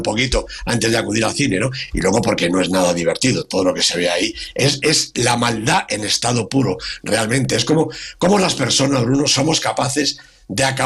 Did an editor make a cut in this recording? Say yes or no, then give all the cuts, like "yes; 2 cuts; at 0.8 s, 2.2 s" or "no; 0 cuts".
no; 0 cuts